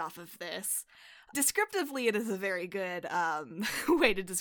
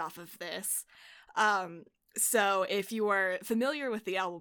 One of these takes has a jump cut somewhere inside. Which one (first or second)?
first